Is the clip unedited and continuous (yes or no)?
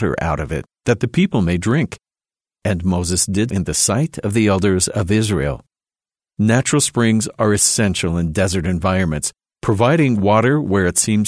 no